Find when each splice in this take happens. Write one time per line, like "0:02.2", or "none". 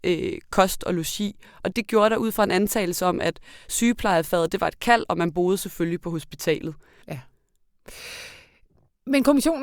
0:01.7
0:07.0